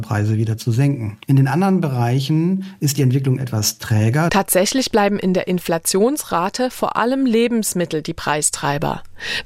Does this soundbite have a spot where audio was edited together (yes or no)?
yes